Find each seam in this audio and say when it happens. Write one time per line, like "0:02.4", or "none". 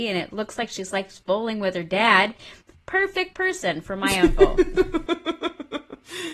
none